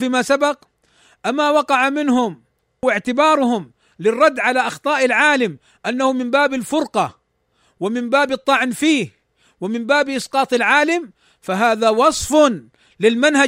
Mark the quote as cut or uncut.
uncut